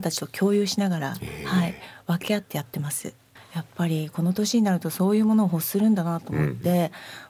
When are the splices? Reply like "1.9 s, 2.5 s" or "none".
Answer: 3.4 s